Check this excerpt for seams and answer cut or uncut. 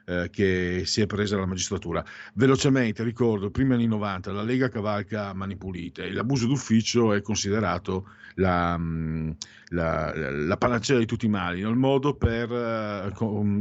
uncut